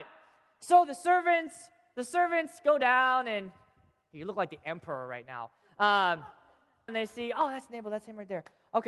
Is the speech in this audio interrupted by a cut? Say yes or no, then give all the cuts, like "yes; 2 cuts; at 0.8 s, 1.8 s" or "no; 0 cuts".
yes; 1 cut; at 6.9 s